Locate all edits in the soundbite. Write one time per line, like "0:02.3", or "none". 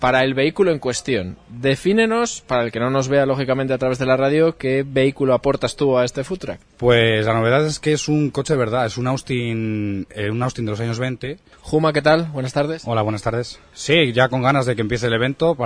0:11.5
0:13.7